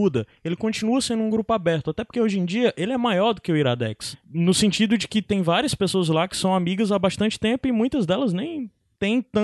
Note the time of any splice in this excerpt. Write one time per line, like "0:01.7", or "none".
0:04.1